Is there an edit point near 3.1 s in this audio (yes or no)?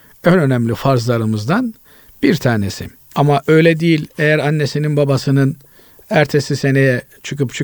yes